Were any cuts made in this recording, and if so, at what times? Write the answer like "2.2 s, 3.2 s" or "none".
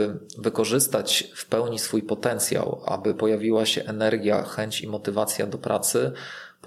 none